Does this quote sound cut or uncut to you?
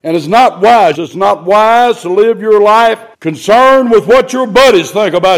cut